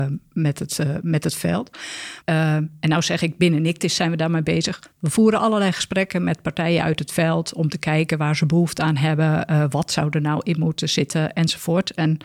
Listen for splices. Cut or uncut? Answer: cut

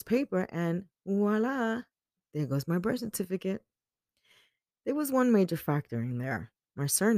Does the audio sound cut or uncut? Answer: uncut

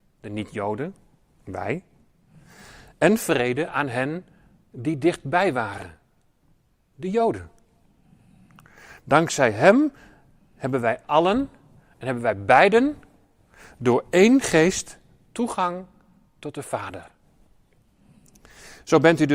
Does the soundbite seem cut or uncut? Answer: uncut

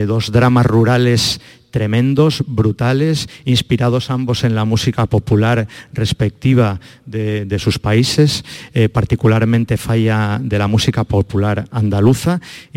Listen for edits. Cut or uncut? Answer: uncut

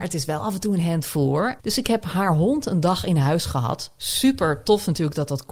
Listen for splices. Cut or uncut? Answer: cut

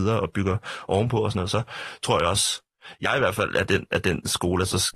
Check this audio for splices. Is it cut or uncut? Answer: uncut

